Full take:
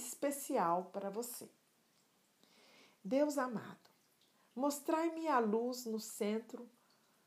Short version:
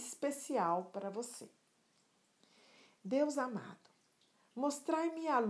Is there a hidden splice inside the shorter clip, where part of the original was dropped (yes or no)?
no